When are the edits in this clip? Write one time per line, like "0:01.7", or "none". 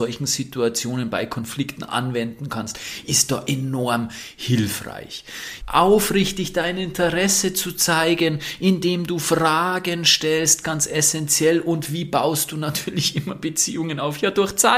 0:05.6
0:10.6